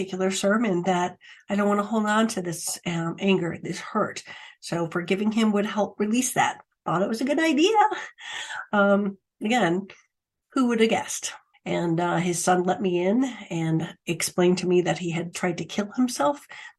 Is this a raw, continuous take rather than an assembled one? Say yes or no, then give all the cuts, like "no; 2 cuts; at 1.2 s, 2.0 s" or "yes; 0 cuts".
no; 2 cuts; at 11.5 s, 15.3 s